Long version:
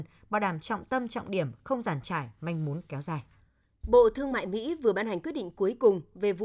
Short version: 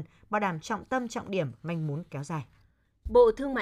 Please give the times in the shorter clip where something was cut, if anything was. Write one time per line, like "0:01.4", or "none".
0:01.6